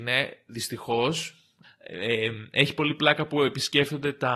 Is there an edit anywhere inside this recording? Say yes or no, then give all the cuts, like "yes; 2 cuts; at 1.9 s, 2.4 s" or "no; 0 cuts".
yes; 1 cut; at 1.6 s